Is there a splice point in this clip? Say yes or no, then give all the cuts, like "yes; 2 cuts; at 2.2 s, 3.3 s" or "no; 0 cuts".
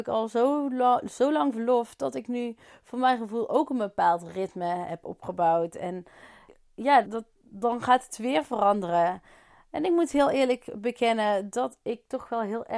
yes; 1 cut; at 7.0 s